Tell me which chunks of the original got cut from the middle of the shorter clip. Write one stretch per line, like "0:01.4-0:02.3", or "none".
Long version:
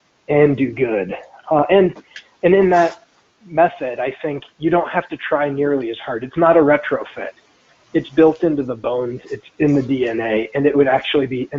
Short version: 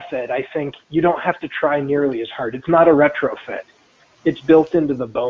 none